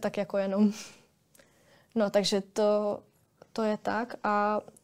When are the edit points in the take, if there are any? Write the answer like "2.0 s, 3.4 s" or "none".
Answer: none